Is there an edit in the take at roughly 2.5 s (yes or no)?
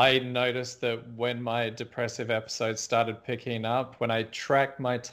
no